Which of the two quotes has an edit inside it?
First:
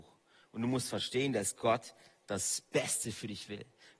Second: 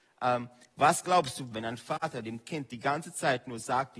second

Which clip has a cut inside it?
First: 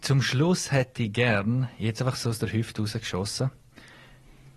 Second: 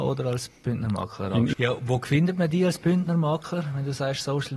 second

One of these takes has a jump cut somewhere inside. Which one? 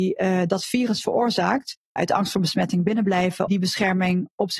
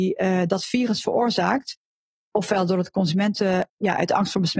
first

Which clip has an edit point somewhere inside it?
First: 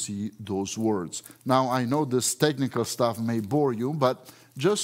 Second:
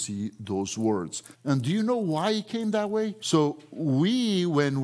second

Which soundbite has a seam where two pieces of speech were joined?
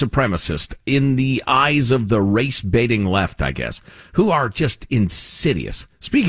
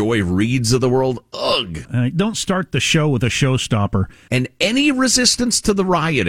second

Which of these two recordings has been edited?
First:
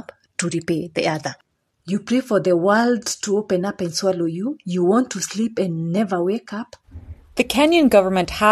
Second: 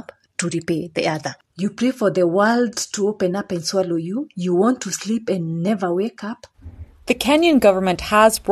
second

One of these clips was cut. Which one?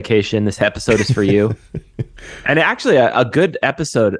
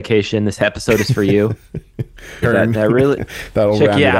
second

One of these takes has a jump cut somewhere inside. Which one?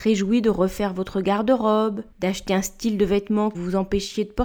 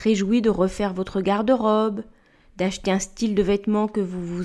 first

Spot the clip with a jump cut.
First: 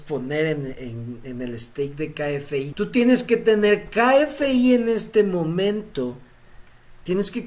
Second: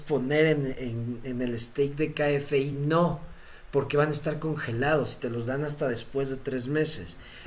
first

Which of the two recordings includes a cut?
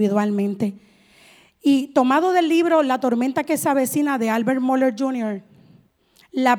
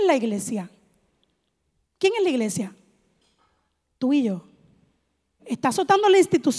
second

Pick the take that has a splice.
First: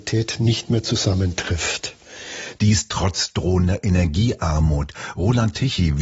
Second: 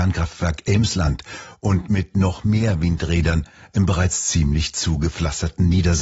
first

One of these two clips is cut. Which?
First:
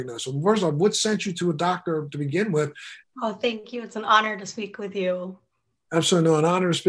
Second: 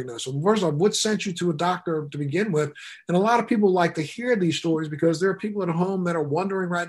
first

